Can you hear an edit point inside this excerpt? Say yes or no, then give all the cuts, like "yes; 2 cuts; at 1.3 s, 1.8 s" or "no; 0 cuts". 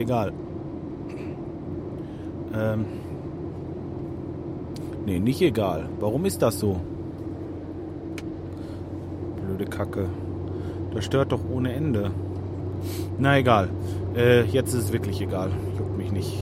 no; 0 cuts